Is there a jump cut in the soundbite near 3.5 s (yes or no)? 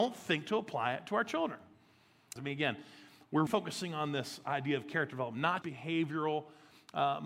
yes